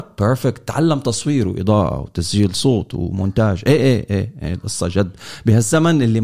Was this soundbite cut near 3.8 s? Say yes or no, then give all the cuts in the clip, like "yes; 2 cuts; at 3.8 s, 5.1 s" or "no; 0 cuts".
yes; 1 cut; at 3.8 s